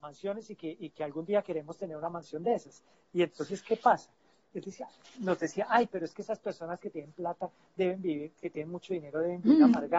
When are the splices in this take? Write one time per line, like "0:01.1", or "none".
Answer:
none